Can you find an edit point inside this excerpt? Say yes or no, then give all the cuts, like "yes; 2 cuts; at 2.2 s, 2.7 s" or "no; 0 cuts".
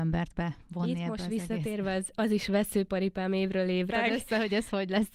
yes; 1 cut; at 3.9 s